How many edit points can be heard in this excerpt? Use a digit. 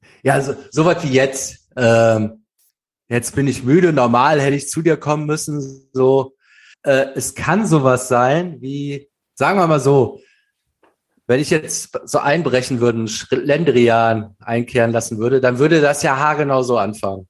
1